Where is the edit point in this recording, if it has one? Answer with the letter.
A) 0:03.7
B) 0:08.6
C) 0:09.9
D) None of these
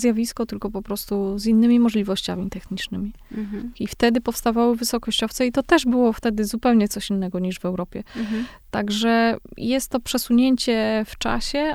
A